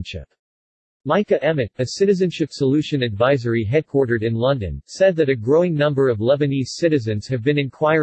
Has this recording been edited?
yes; 1 cut; at 1.7 s

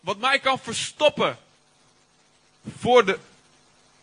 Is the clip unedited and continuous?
yes; 0 cuts

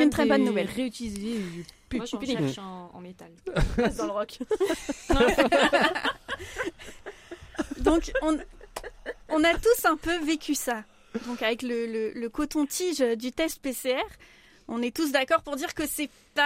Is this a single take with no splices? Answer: yes; 0 cuts

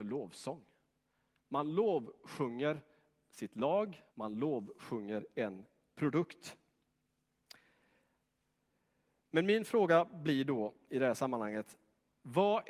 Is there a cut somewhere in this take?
yes; 1 cut; at 4.1 s

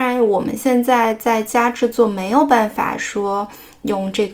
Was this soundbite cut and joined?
no; 0 cuts

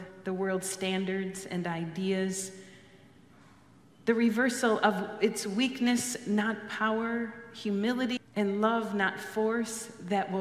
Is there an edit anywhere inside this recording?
yes; 1 cut; at 8.2 s

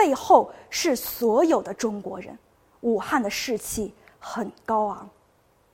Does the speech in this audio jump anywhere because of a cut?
no; 0 cuts

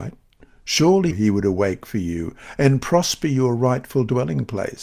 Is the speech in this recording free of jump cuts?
no; 1 cut; at 1.1 s

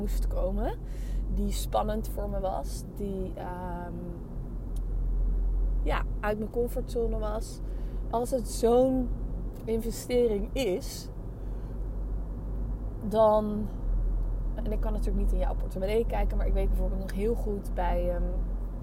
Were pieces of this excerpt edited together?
yes; 2 cuts; at 8.1 s, 14.6 s

